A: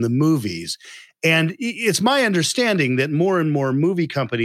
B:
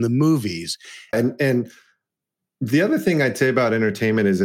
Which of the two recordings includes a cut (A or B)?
B